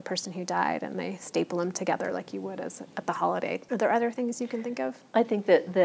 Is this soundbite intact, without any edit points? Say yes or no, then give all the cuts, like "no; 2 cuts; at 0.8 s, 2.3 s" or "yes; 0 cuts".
yes; 0 cuts